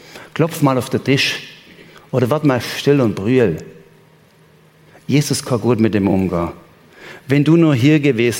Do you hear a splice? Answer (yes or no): no